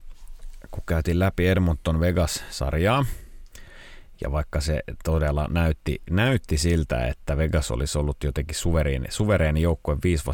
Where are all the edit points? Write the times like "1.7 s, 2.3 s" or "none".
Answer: none